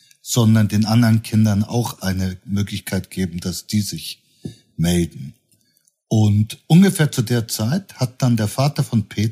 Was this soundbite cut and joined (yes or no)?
no